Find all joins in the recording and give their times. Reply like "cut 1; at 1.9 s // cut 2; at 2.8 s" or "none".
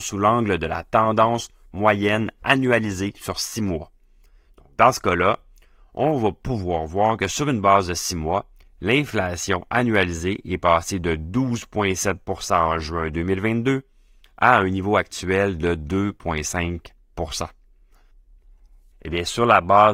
cut 1; at 18.9 s